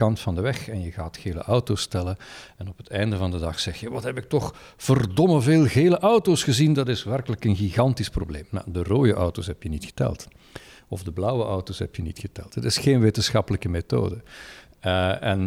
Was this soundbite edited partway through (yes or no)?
no